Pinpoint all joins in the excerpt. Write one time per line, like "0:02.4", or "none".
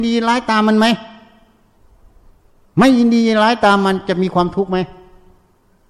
none